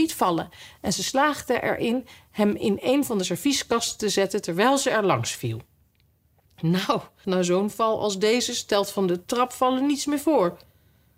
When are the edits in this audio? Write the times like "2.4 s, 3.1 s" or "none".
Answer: 7.2 s